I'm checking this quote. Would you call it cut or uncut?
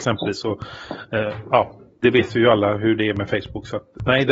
uncut